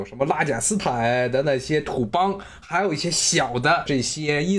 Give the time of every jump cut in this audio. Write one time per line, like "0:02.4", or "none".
none